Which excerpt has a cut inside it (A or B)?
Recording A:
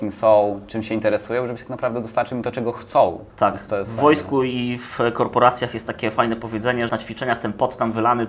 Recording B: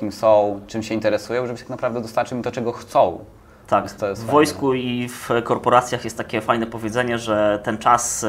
A